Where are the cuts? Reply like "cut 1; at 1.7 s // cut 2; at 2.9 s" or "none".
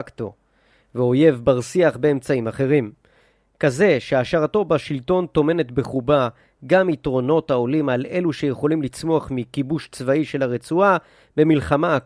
none